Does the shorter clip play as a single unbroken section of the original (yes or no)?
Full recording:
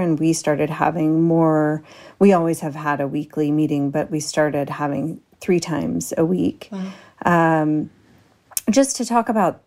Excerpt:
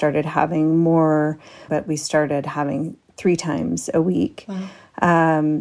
no